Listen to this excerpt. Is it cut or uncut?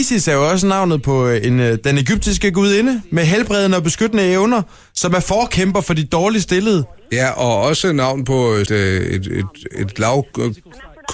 cut